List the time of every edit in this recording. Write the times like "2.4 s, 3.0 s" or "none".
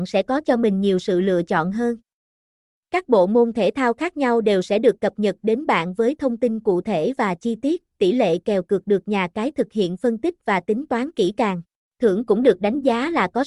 11.8 s